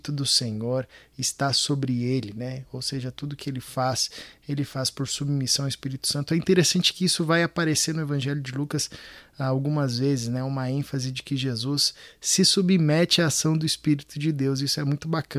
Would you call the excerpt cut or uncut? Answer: uncut